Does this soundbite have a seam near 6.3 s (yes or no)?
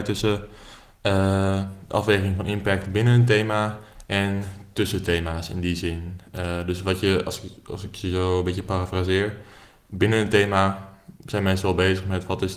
no